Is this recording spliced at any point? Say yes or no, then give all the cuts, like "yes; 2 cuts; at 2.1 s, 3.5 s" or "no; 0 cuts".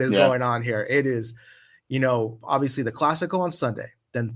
no; 0 cuts